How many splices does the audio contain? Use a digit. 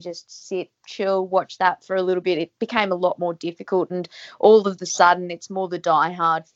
0